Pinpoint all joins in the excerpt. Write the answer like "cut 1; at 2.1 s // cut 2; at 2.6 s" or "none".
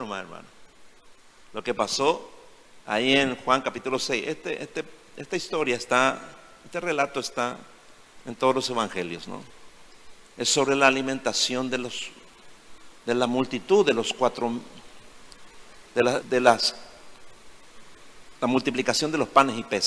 cut 1; at 16.2 s

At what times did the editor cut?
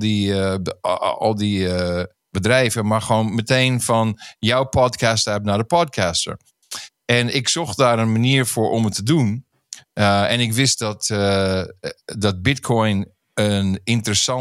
none

